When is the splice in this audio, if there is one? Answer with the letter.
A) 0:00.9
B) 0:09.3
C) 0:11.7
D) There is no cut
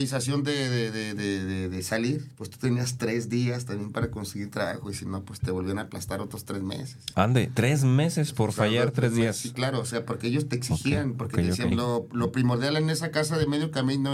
C